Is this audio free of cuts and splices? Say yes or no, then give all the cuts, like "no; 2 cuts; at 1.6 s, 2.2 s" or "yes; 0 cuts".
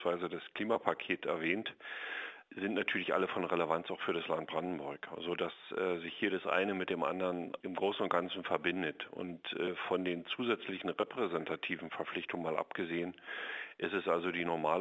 no; 1 cut; at 7.6 s